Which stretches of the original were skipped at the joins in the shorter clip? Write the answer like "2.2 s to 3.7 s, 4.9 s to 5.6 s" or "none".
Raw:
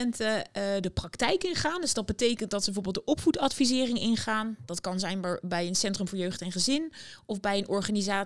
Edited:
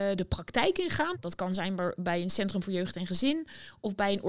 1.8 s to 4.6 s